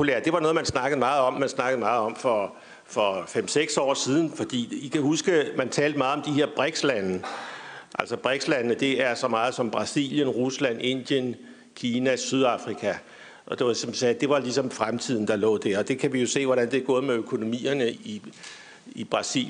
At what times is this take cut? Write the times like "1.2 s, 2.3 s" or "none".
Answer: 1.4 s, 17.9 s

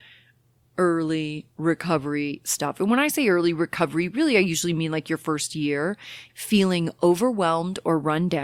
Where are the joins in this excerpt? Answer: 6.3 s

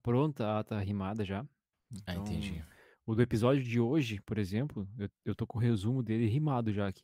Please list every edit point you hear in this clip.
1.7 s

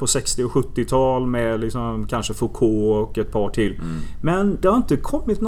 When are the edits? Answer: none

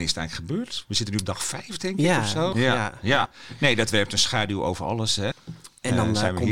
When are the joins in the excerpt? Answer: 2.5 s, 5.3 s

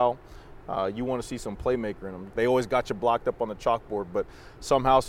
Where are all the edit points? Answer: 2.3 s

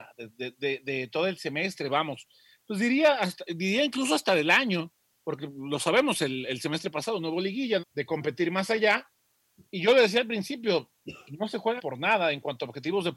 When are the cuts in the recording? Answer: 7.8 s, 11.8 s

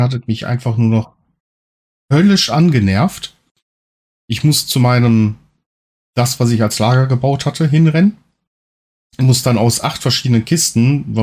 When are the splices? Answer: none

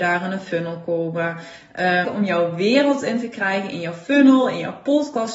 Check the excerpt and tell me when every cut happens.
2.0 s

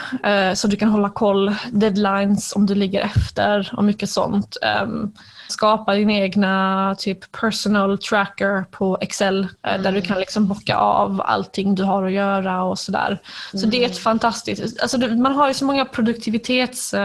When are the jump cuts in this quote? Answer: 5.5 s, 9.6 s

